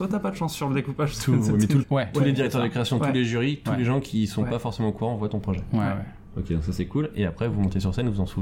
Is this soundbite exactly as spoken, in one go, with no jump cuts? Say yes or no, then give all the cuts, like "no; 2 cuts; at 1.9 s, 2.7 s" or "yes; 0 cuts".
no; 1 cut; at 1.8 s